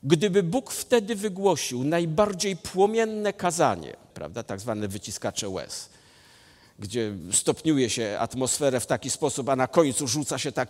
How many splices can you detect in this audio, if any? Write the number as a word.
one